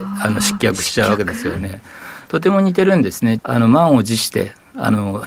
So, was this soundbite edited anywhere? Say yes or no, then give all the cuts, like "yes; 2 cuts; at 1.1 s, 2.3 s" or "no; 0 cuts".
yes; 1 cut; at 3.4 s